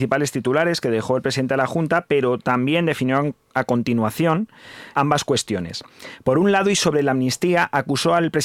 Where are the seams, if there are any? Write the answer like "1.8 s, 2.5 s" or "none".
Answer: 4.9 s